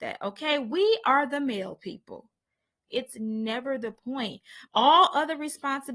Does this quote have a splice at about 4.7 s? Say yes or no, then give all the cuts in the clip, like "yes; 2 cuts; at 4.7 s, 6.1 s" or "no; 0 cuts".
yes; 2 cuts; at 2.9 s, 4.7 s